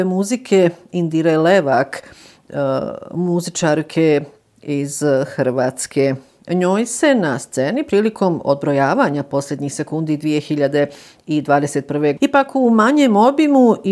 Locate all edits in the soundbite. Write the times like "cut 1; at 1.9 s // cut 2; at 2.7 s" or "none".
cut 1; at 12.2 s